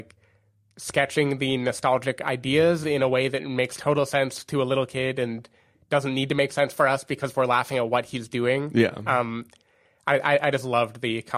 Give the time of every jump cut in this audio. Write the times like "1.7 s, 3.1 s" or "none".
none